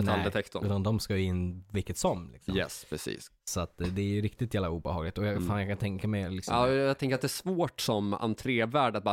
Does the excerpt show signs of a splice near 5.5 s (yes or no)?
no